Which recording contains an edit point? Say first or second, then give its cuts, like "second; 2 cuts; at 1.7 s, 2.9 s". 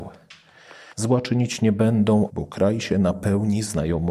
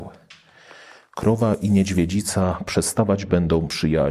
first; 2 cuts; at 0.9 s, 2.3 s